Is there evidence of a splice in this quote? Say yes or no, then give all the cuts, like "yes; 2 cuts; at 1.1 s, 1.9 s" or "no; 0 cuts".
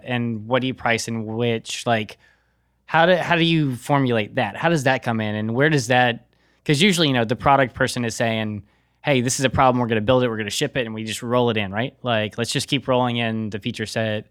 no; 0 cuts